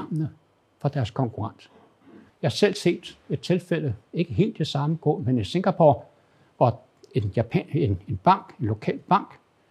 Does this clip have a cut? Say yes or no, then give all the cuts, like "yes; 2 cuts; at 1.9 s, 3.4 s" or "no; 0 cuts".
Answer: yes; 1 cut; at 2.3 s